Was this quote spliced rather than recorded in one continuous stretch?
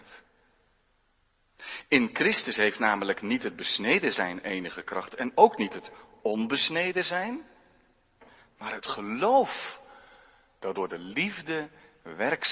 no; 0 cuts

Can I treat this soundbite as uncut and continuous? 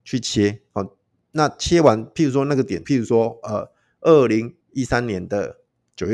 no; 2 cuts; at 2.8 s, 4.6 s

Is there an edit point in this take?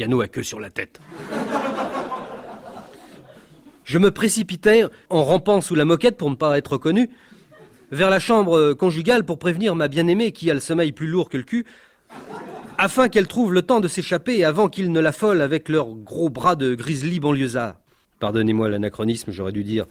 yes; 2 cuts; at 5.1 s, 18.0 s

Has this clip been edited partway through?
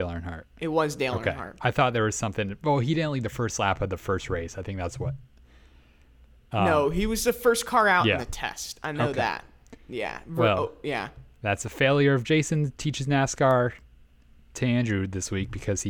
no; 0 cuts

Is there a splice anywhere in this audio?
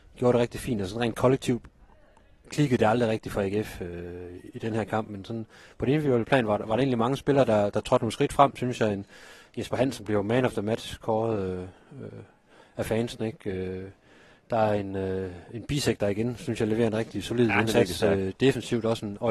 no; 0 cuts

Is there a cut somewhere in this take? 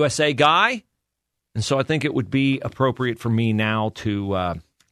no; 0 cuts

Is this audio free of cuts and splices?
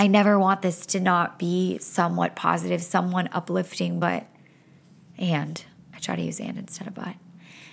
yes; 0 cuts

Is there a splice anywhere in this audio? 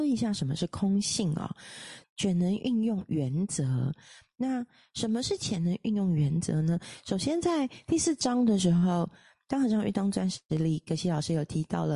yes; 1 cut; at 2.0 s

